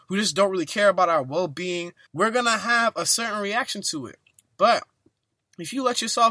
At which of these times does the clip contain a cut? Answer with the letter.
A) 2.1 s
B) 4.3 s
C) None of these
A